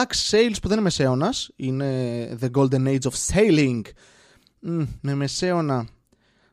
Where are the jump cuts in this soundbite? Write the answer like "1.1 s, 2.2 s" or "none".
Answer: none

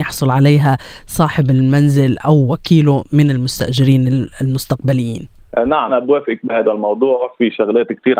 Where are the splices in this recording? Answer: 5.9 s

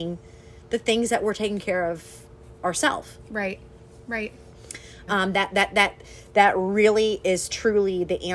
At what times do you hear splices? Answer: 5.1 s

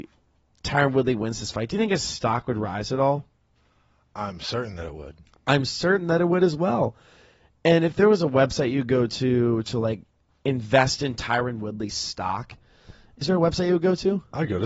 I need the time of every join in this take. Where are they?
none

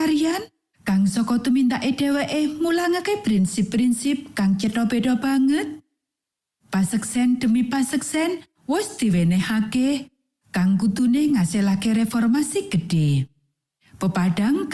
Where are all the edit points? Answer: none

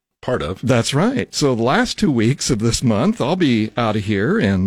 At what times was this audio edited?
none

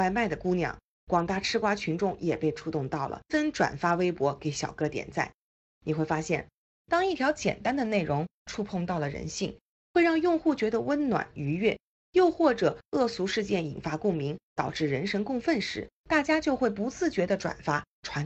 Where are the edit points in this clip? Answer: 3.3 s, 5.7 s

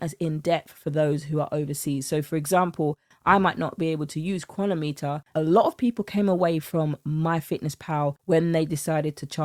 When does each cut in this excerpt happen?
5.3 s

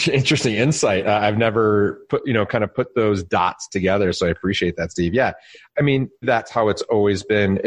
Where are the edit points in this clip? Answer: 6.2 s

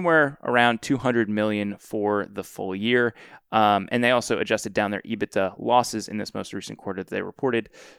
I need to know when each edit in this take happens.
none

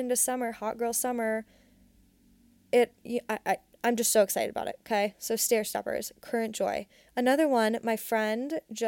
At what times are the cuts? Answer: none

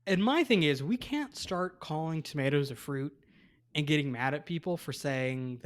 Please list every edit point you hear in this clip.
none

